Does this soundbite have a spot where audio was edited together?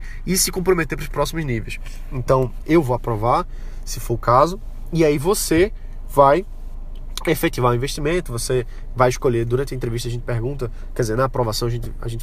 yes; 1 cut; at 2.6 s

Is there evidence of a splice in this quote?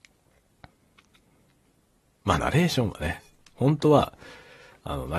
no; 0 cuts

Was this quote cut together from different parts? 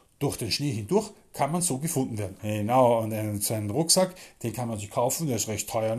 yes; 1 cut; at 2.4 s

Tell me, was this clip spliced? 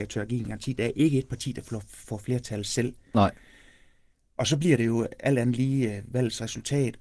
no; 0 cuts

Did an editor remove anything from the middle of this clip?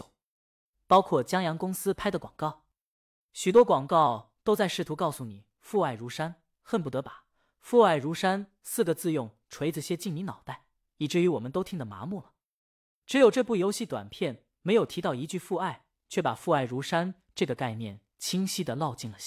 no; 0 cuts

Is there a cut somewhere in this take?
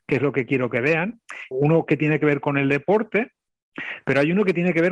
yes; 1 cut; at 1.5 s

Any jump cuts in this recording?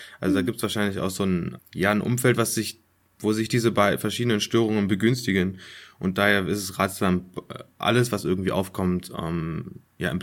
yes; 1 cut; at 1.6 s

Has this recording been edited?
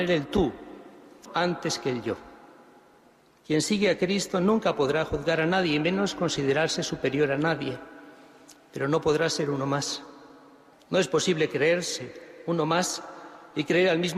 yes; 2 cuts; at 1.3 s, 10.7 s

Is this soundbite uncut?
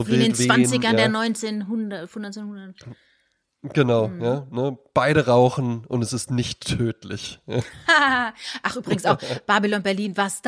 yes; 0 cuts

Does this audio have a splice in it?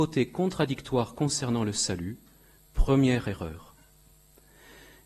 no; 0 cuts

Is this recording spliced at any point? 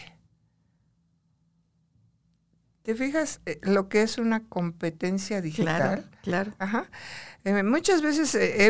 no; 0 cuts

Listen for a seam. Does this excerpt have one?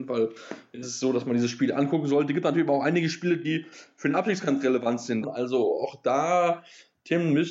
yes; 1 cut; at 5.2 s

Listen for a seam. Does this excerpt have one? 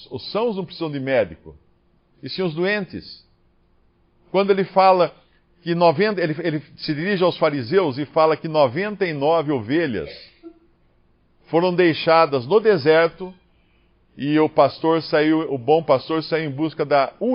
no; 0 cuts

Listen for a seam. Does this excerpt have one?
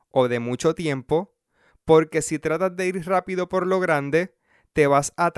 no; 0 cuts

